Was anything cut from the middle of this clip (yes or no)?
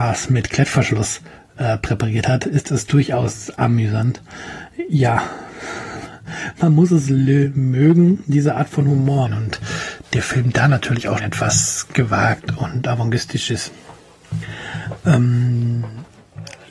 yes